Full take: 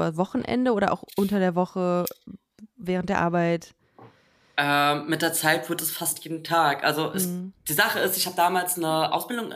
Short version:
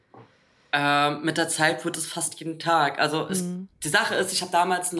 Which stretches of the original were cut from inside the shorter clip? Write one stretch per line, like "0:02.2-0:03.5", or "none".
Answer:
none